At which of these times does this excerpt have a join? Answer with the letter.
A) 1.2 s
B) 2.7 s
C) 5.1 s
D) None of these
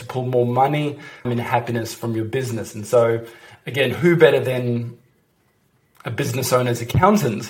A